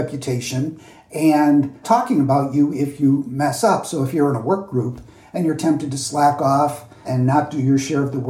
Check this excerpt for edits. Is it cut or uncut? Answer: cut